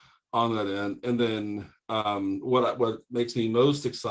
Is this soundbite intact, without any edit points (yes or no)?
yes